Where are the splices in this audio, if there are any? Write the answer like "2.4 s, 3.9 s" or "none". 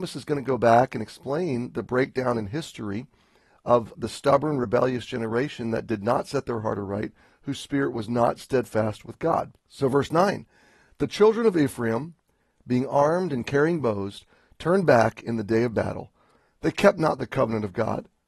3.9 s, 9.6 s